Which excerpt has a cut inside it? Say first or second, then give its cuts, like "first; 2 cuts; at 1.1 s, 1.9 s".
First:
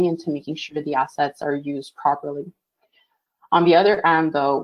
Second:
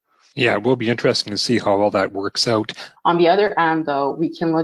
second; 1 cut; at 3.0 s